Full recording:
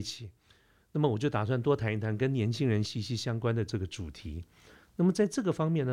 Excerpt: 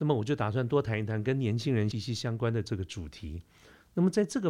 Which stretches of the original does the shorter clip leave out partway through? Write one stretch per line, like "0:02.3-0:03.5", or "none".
0:02.9-0:02.9

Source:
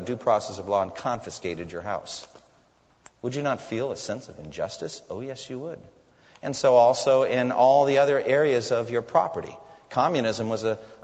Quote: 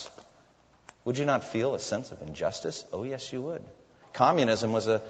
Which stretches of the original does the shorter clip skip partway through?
0:06.2-0:09.8

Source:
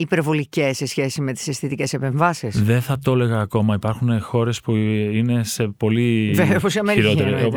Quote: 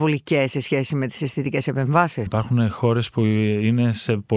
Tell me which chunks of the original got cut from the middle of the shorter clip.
0:02.5-0:03.8

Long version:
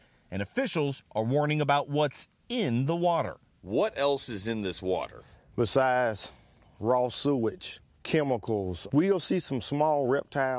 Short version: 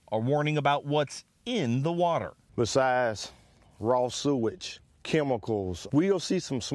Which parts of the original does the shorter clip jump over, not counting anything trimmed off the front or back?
0:03.5-0:05.5

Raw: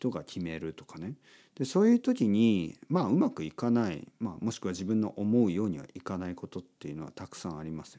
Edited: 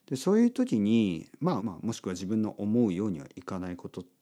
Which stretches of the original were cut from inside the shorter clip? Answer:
0:03.1-0:04.2

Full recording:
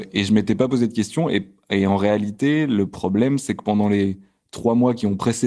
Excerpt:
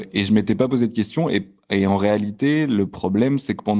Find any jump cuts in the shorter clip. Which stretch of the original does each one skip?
none

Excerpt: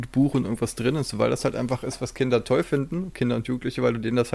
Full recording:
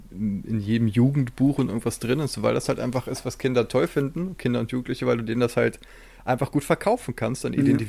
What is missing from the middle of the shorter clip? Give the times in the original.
none

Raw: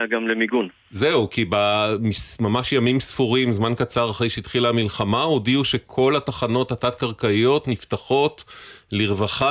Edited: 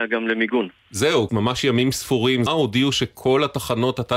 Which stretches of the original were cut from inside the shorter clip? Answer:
0:01.3-0:02.4
0:03.5-0:05.2

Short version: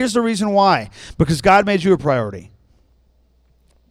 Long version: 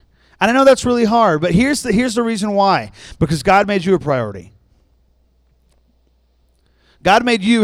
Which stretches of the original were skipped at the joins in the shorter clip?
none

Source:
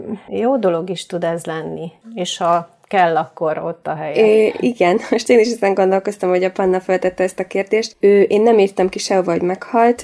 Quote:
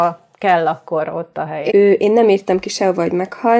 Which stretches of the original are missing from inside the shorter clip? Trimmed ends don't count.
0:04.2-0:08.0

